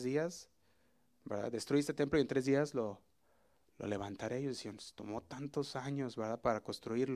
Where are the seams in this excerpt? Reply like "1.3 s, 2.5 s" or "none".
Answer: none